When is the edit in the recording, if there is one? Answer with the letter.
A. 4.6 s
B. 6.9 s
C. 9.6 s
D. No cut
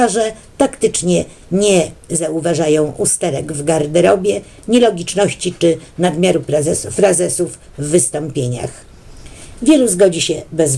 C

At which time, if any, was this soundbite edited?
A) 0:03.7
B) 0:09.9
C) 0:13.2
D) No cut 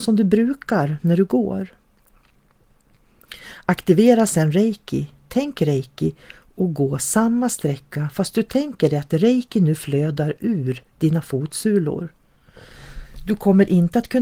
D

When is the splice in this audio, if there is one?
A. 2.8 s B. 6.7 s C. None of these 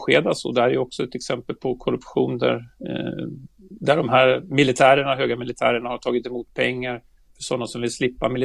C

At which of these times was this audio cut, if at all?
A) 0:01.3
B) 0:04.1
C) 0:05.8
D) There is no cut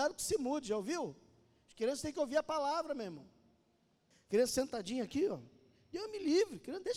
B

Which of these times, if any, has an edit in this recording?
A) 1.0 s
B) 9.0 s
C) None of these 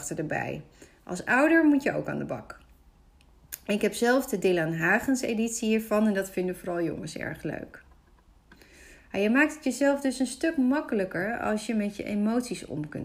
C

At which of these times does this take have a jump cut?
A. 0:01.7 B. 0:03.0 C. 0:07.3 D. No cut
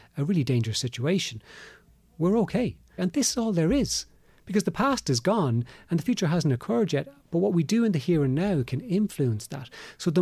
B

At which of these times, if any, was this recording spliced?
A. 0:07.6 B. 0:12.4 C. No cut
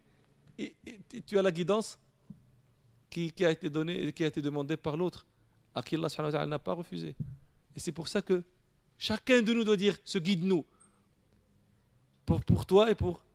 C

